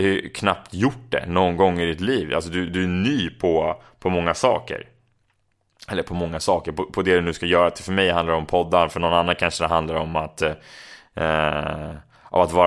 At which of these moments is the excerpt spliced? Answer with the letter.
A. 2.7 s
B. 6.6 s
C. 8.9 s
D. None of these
D